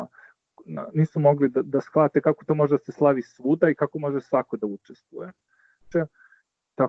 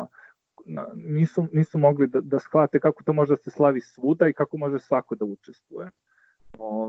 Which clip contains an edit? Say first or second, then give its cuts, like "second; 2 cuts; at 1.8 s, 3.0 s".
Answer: first; 2 cuts; at 0.9 s, 5.9 s